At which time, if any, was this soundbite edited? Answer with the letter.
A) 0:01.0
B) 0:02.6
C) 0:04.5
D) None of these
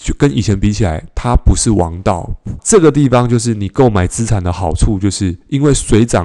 B